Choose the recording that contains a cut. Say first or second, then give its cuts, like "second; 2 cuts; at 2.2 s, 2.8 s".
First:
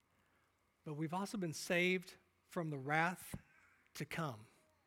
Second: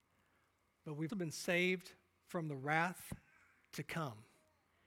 second; 1 cut; at 1.1 s